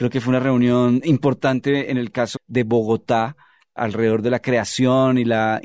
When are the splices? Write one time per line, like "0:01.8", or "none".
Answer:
0:02.4